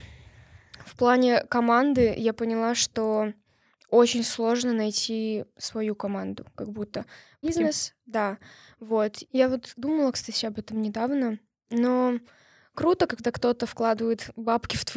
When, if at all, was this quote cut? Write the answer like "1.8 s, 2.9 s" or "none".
7.4 s, 9.3 s, 13.1 s

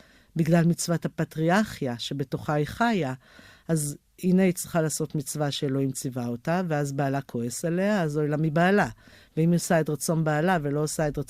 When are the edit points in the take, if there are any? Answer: none

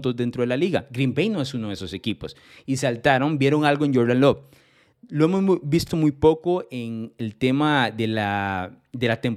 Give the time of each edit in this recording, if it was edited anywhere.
none

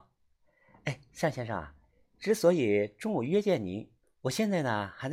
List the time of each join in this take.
4.0 s

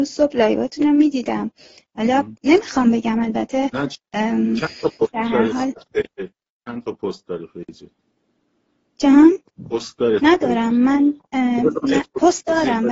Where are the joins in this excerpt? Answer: none

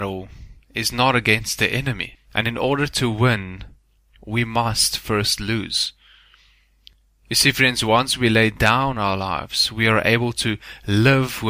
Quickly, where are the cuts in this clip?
2.1 s

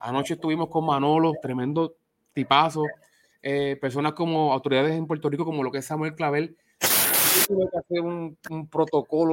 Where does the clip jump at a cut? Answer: 6.8 s

